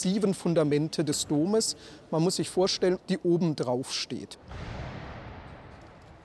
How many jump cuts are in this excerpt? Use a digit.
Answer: 1